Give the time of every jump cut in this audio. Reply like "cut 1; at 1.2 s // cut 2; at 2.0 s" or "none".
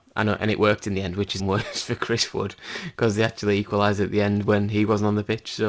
cut 1; at 1.4 s